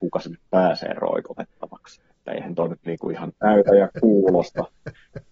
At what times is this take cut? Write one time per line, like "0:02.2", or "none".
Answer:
0:02.1
0:03.4